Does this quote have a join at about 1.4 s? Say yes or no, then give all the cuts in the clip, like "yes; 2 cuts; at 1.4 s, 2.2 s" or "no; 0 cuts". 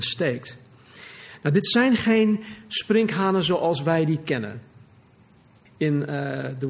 no; 1 cut; at 5.6 s